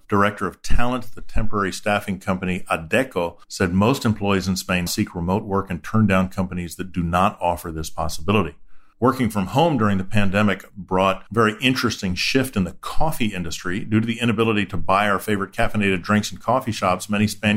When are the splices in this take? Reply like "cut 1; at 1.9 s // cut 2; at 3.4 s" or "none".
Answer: cut 1; at 4.9 s